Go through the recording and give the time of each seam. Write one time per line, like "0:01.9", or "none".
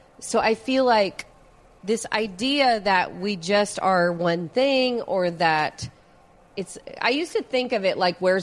none